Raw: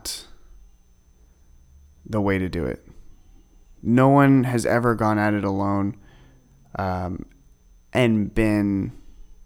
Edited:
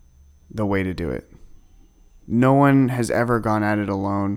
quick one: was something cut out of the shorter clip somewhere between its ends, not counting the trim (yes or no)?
no